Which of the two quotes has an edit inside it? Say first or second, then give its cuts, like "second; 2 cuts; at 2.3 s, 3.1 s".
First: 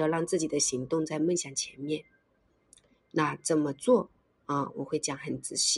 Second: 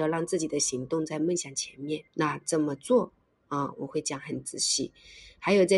second; 1 cut; at 2.1 s